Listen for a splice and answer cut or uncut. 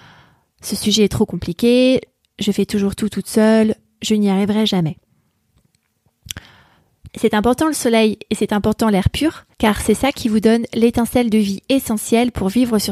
cut